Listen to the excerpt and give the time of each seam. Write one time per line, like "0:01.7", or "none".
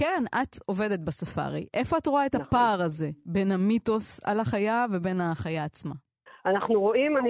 none